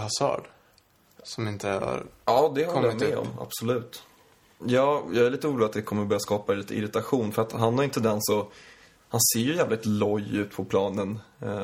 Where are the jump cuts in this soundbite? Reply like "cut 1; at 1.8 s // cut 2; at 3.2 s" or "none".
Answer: cut 1; at 4.6 s